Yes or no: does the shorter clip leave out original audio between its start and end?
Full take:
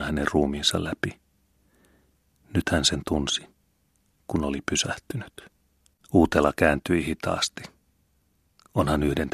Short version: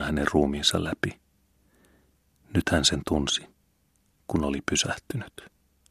no